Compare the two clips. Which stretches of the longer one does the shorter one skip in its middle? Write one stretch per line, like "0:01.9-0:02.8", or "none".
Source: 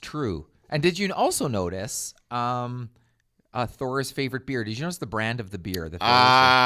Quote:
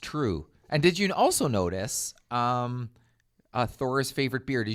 none